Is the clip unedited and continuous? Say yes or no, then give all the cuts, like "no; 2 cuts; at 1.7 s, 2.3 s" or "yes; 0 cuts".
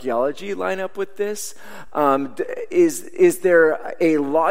yes; 0 cuts